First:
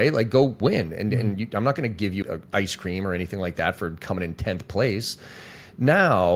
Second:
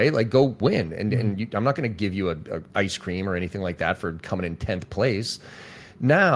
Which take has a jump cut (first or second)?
first